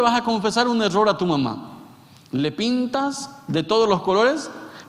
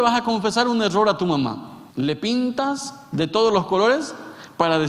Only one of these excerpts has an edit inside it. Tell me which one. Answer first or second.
second